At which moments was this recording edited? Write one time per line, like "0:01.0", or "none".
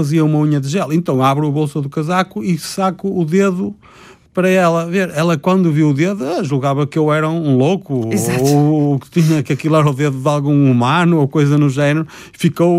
none

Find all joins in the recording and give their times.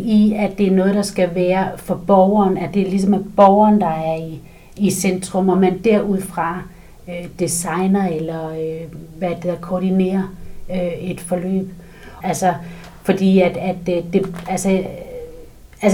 0:12.2

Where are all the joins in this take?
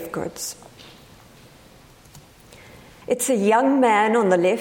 0:03.0

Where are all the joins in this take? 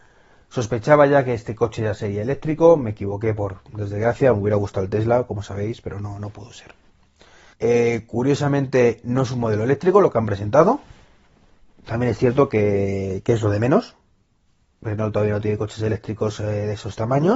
0:07.5

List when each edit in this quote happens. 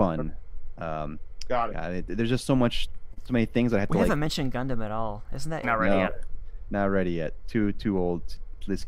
0:01.7
0:05.6

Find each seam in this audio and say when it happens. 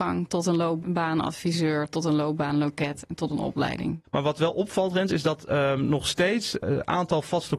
0:04.0

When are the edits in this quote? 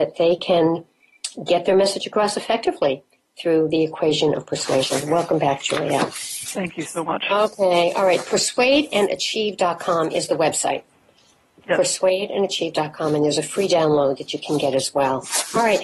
none

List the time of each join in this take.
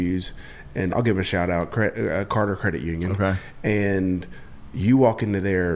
0:00.9

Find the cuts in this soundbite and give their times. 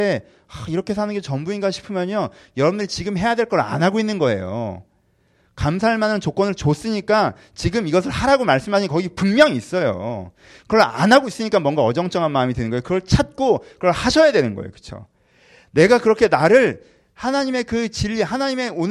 none

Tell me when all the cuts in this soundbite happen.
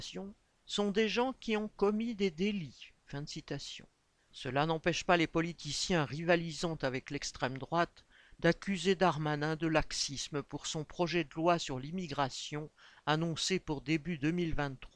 0:04.2

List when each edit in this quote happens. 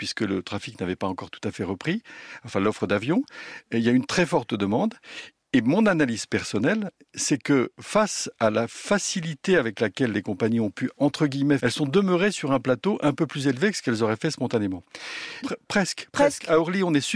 0:11.6
0:15.4

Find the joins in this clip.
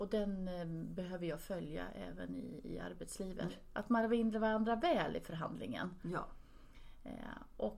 0:03.5

